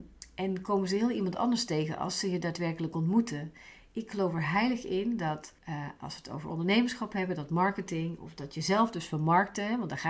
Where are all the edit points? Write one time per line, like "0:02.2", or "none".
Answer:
0:05.6